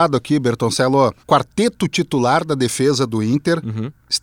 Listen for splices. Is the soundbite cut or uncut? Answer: cut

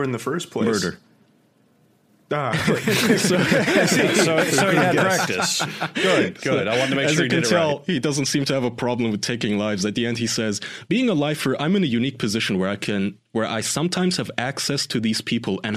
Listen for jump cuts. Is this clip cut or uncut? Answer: uncut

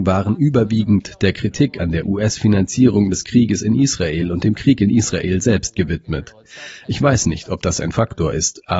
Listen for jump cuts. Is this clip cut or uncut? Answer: uncut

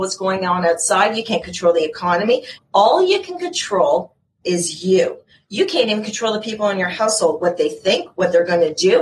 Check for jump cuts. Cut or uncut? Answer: cut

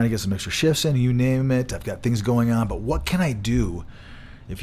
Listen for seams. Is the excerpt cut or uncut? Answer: uncut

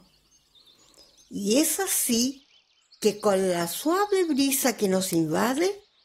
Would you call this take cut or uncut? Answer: uncut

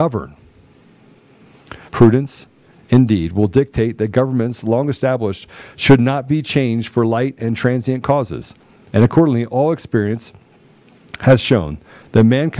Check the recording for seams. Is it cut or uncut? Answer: cut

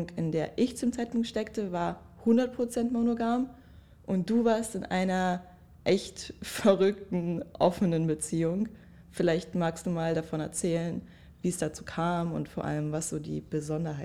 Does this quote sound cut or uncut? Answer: uncut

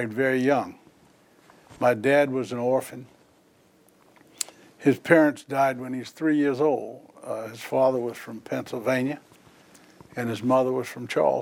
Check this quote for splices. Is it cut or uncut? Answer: uncut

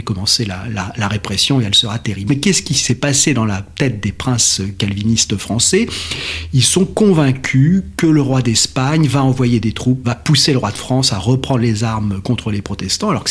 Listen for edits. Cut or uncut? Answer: cut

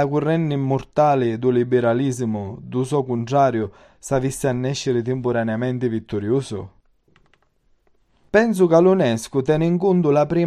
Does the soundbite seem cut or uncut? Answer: cut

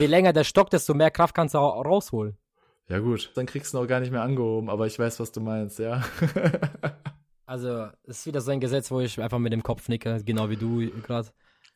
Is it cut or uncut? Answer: cut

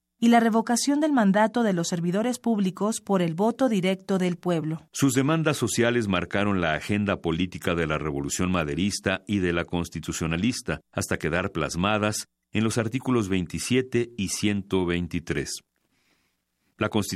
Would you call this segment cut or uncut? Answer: cut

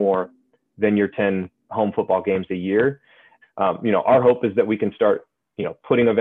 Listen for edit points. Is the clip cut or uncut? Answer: cut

